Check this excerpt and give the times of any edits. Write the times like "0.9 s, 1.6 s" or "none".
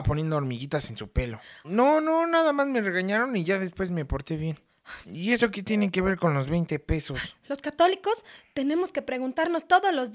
1.6 s, 5.0 s, 7.3 s